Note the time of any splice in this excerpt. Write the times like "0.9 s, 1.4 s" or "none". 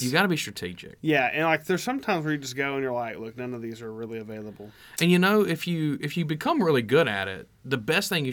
none